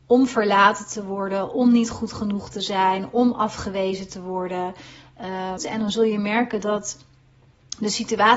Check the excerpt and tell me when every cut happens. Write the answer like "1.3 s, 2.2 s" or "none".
5.6 s

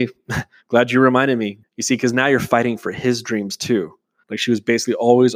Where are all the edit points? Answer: 1.6 s, 4.2 s

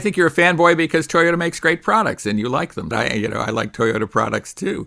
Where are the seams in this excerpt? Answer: 2.9 s

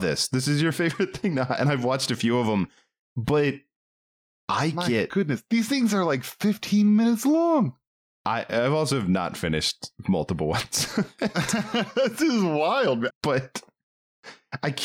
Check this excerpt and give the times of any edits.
13.1 s

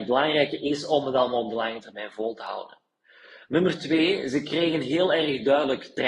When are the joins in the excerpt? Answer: none

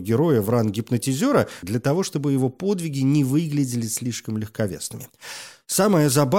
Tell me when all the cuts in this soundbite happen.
1.6 s

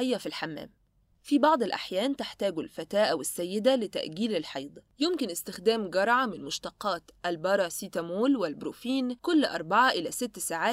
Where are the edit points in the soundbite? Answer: 1.1 s, 4.9 s, 9.2 s

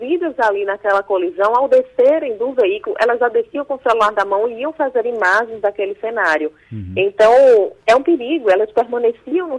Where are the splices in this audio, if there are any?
7.8 s

